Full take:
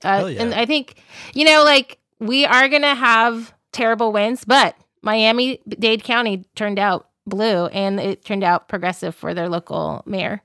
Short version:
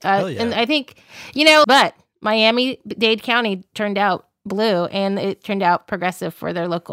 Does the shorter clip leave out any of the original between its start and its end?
yes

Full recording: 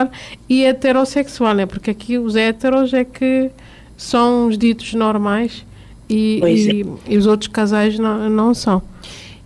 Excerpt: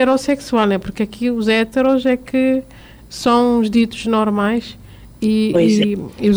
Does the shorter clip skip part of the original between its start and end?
no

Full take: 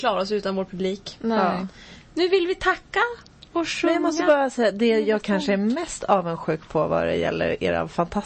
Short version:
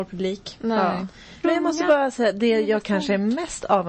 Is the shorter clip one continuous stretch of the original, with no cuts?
no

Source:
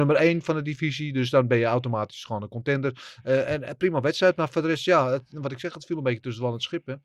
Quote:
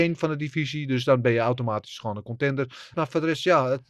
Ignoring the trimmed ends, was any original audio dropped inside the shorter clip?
yes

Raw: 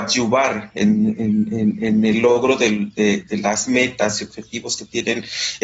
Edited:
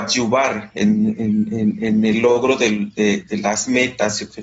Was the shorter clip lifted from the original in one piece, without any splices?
yes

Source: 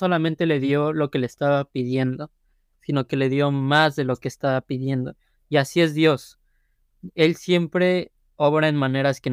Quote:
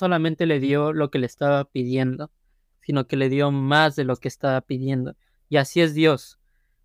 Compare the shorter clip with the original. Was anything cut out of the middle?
no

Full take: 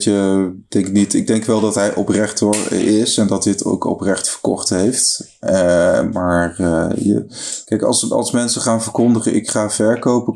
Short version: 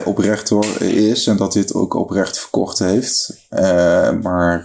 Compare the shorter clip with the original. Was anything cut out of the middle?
no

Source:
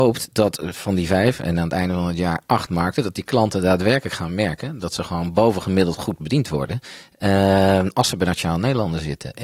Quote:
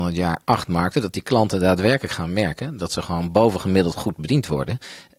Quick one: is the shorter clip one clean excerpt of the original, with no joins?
yes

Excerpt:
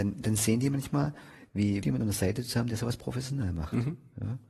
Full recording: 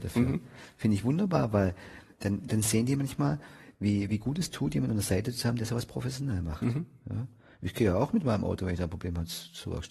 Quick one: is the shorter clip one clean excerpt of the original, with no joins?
no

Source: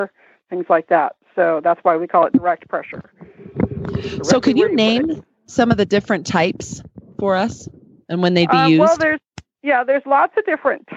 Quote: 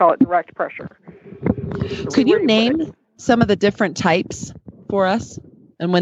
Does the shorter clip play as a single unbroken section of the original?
no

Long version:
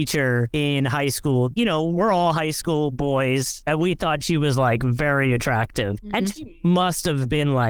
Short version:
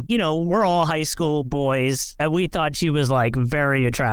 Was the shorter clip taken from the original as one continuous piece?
yes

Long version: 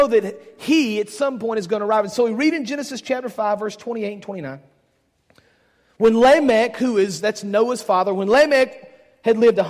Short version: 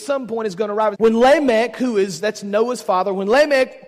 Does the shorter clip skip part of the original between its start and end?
yes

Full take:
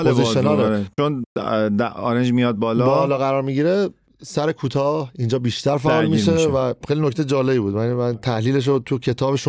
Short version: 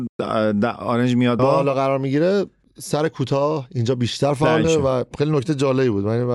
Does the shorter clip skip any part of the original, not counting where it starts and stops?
yes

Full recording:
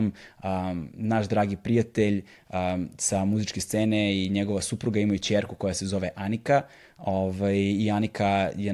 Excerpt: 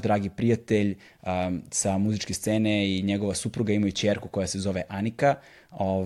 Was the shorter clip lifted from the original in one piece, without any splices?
yes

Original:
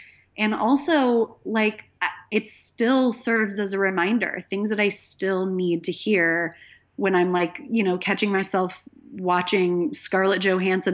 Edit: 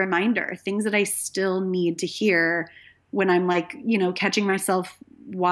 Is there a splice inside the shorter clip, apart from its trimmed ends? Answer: no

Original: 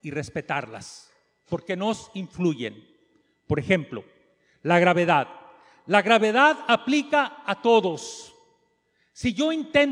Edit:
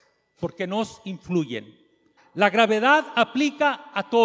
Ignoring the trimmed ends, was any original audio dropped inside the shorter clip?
yes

